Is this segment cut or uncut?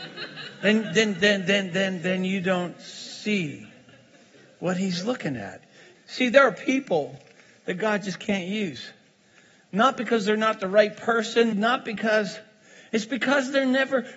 cut